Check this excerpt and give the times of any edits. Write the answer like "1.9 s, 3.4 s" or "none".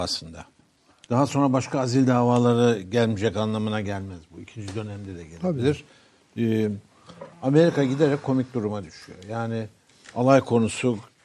7.3 s